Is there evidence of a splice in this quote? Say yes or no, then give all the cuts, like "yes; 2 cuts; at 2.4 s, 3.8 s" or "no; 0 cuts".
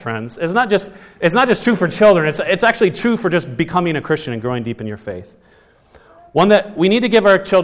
no; 0 cuts